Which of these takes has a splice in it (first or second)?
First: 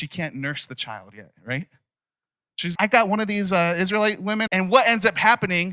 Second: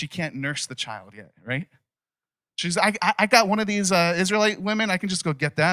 first